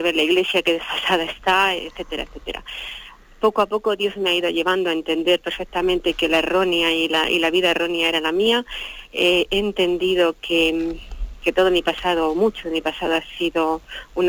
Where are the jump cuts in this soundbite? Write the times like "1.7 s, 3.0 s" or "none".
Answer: none